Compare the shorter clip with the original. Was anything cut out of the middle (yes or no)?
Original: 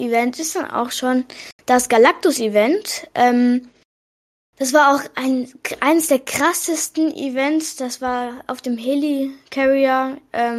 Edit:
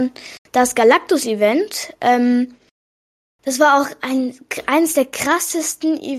no